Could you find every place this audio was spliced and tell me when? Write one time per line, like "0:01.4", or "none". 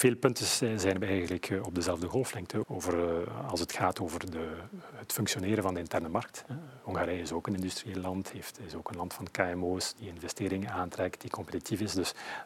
0:02.6